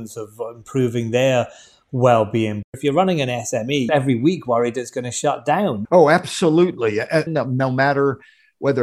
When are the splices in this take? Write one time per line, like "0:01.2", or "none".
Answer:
0:03.9
0:05.8
0:07.3